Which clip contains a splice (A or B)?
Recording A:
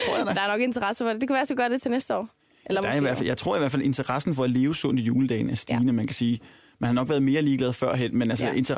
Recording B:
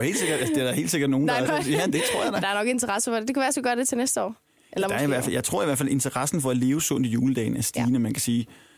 B